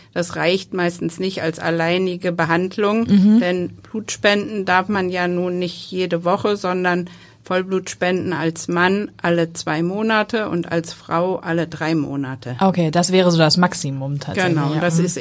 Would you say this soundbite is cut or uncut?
uncut